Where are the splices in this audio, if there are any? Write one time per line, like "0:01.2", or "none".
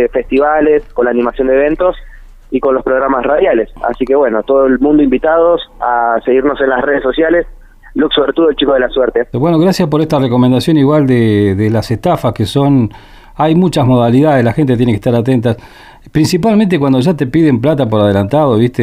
0:09.3